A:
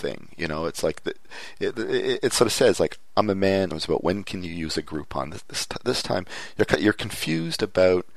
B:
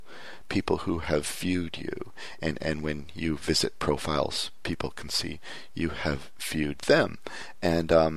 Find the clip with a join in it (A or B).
A